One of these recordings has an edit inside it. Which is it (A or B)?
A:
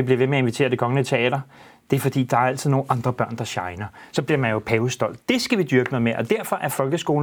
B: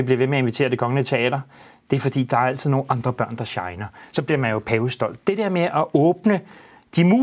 A